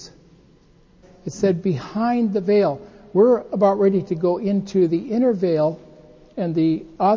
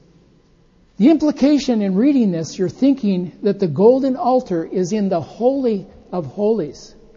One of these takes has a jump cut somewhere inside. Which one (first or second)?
first